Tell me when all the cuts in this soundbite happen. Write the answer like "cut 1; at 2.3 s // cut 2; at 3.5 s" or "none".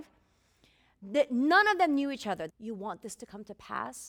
cut 1; at 2.5 s